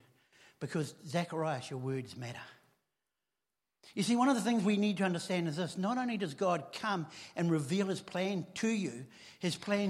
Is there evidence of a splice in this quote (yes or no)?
no